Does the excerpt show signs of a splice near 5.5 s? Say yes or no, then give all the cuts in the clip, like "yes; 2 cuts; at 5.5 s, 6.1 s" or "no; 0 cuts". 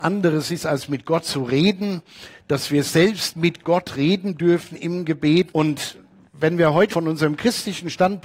yes; 2 cuts; at 5.5 s, 6.9 s